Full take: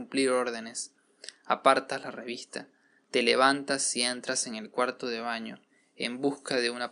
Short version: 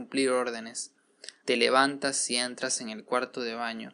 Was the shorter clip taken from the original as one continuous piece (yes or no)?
no